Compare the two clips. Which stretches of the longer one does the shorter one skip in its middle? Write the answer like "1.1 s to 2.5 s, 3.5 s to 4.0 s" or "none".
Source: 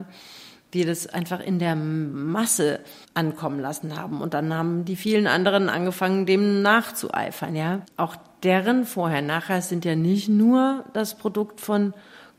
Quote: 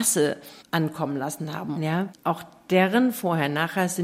4.2 s to 7.5 s